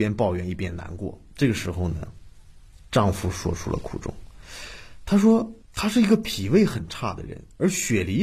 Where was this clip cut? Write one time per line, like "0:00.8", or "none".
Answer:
0:05.6